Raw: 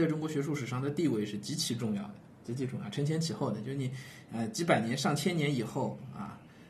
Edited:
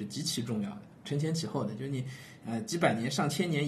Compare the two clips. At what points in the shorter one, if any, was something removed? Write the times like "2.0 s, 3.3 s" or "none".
1.0 s